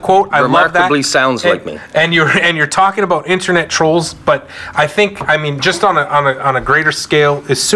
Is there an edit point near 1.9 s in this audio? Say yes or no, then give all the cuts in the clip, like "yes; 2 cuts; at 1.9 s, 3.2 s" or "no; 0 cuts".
no; 0 cuts